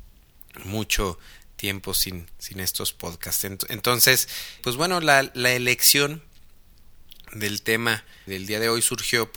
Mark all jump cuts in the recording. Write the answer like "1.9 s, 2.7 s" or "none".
4.6 s, 8.3 s